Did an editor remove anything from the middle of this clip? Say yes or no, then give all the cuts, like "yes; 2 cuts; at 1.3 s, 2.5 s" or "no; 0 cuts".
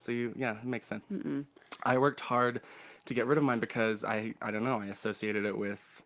yes; 1 cut; at 1.0 s